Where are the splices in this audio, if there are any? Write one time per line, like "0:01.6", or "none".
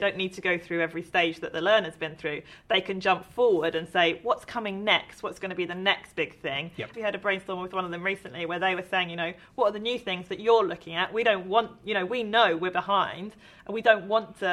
0:06.9